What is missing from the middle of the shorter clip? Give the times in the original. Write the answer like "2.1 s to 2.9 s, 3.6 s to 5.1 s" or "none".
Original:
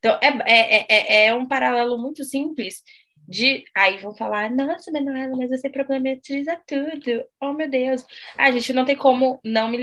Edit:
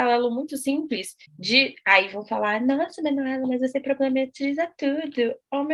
2.9 s to 3.2 s

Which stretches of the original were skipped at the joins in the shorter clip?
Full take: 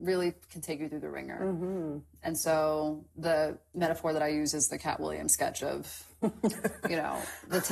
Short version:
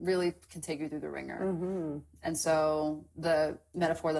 none

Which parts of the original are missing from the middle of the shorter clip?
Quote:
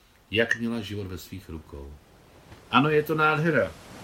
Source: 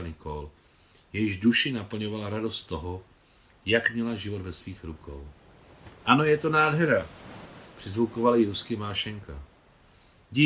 none

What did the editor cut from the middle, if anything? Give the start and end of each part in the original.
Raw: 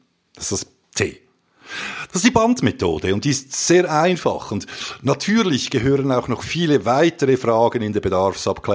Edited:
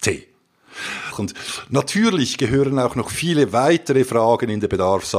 2.1 s to 4.4 s

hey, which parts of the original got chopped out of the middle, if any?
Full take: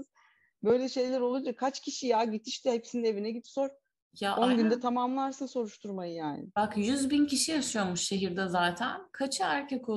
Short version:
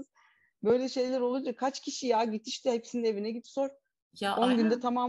none

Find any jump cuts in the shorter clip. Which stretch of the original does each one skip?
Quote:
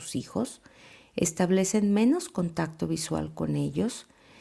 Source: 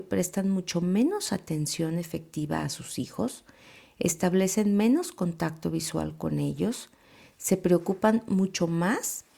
none

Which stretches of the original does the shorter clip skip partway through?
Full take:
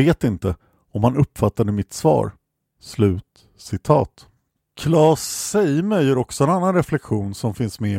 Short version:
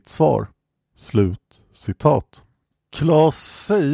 none

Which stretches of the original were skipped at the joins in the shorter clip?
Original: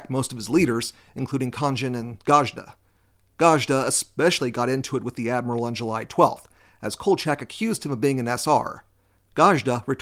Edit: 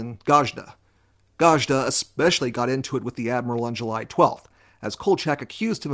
none

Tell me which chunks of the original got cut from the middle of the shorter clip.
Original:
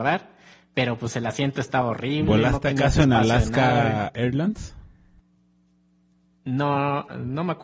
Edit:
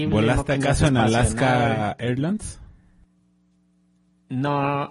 none

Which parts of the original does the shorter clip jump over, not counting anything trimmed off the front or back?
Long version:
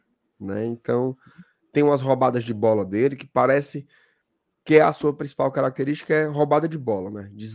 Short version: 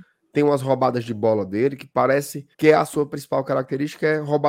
3.9 s to 4.6 s

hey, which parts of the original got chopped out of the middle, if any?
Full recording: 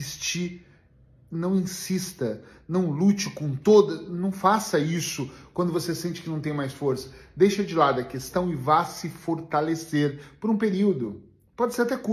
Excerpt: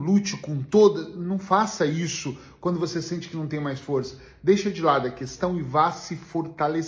none

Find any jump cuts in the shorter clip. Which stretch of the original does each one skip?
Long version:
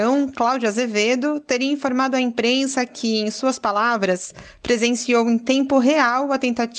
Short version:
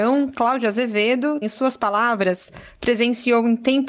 1.4 s to 3.2 s

